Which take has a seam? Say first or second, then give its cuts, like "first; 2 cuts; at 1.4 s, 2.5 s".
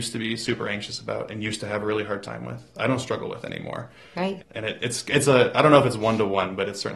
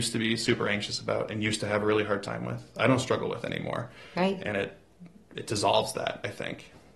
first; 1 cut; at 4.4 s